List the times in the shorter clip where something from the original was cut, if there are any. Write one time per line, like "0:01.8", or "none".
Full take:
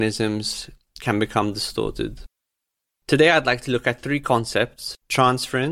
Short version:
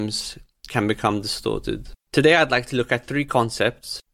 0:02.0